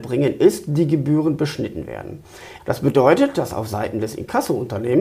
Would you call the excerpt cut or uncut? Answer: cut